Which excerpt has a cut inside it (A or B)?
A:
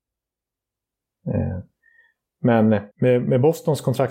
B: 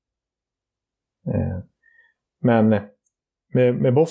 A